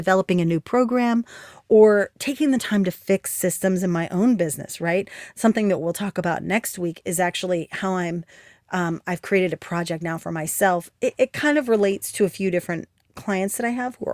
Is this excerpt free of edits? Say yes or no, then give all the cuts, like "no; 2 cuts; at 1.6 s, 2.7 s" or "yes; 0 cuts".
yes; 0 cuts